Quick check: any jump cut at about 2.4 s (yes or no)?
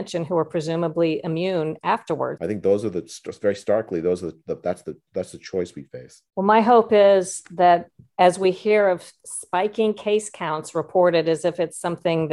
yes